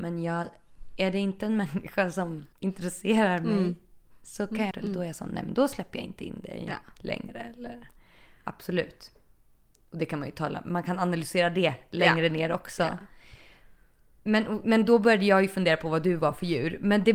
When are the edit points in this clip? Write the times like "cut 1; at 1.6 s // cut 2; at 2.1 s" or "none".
cut 1; at 4.7 s